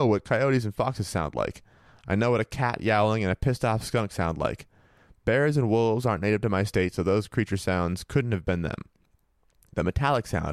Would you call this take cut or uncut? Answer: uncut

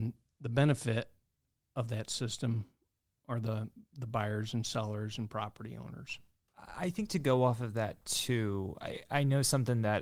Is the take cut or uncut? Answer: uncut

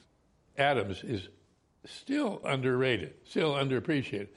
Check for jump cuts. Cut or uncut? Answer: cut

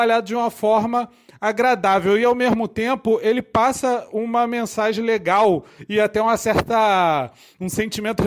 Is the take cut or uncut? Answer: uncut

